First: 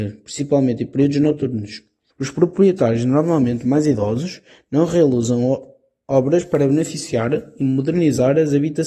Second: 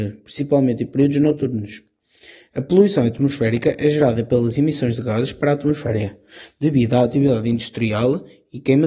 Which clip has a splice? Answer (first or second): first